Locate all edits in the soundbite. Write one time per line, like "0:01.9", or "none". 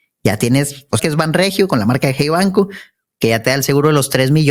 0:01.0